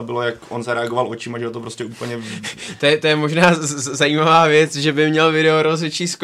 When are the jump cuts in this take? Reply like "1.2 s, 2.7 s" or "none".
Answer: none